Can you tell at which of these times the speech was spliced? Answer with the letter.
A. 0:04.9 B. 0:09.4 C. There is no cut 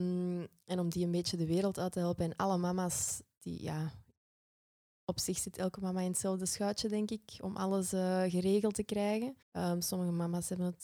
B